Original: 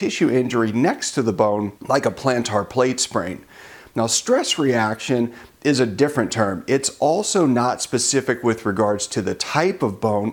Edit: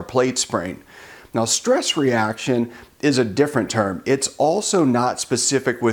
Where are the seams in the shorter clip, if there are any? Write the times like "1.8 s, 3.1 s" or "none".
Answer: none